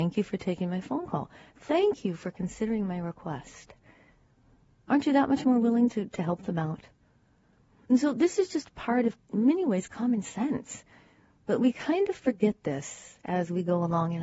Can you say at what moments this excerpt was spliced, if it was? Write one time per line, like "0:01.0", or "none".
none